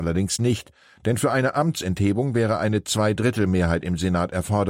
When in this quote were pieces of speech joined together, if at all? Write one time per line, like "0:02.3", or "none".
none